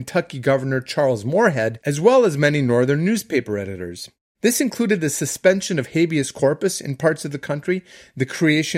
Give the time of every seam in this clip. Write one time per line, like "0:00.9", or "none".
0:04.3